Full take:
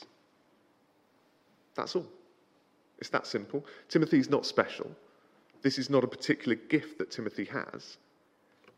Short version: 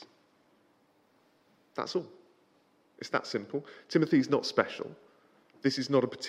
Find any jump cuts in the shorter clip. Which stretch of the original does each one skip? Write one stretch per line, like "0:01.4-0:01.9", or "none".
none

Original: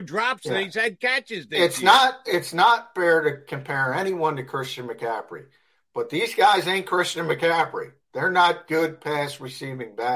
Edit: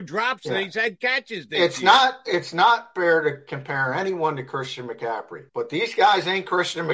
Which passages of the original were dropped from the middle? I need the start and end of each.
0:05.5-0:05.9

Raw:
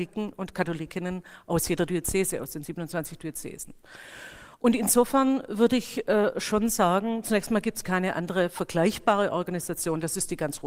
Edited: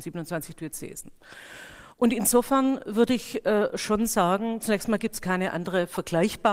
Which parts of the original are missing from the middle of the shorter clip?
none

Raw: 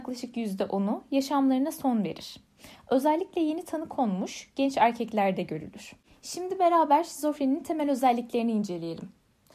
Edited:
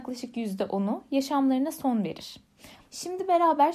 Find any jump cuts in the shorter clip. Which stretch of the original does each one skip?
0:02.8-0:06.1

